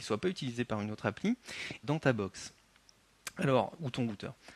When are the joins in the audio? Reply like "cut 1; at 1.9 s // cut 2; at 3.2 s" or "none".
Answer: cut 1; at 1.8 s